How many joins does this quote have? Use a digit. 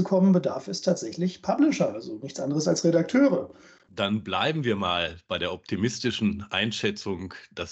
1